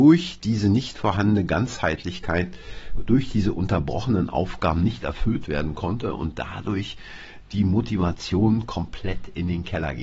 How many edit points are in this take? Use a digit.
0